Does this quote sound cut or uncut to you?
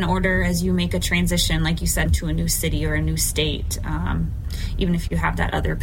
cut